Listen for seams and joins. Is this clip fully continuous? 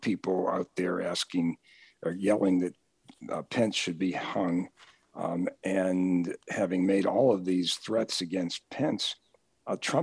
yes; 0 cuts

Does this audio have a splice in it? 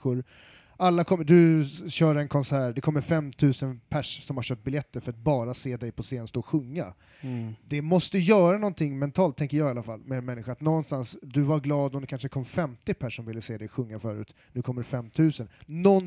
no; 0 cuts

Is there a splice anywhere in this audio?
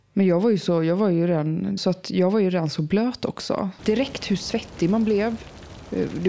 yes; 2 cuts; at 1.8 s, 3.8 s

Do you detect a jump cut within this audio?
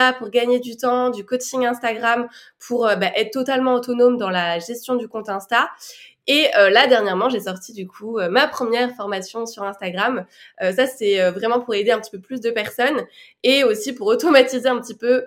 no; 0 cuts

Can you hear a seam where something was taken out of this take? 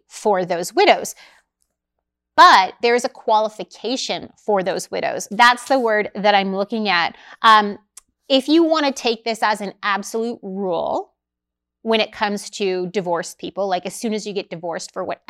yes; 1 cut; at 5.3 s

